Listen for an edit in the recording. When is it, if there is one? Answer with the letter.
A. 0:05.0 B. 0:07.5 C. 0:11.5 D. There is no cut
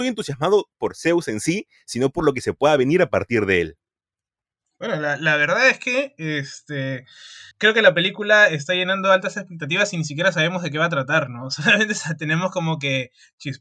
B